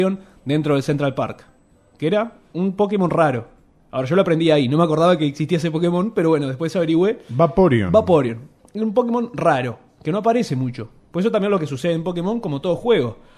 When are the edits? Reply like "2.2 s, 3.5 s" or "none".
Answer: none